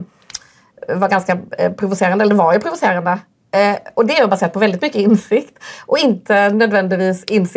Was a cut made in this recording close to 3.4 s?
no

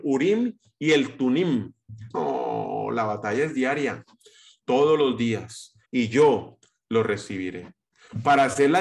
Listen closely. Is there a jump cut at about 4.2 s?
no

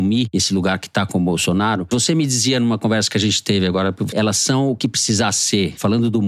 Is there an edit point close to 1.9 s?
no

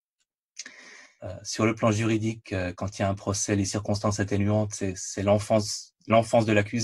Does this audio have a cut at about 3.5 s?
no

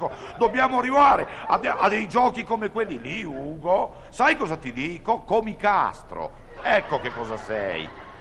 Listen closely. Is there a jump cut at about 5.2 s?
no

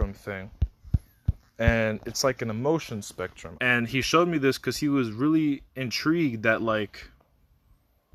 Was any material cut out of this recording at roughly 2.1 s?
no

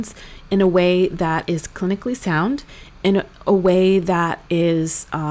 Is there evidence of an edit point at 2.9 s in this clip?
no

